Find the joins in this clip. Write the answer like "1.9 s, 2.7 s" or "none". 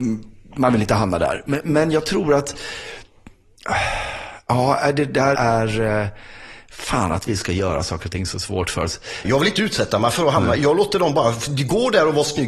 5.3 s, 9.2 s